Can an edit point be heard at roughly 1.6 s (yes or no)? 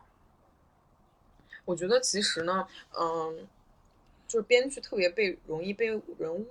no